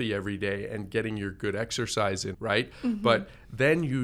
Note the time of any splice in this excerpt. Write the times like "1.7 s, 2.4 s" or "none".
2.3 s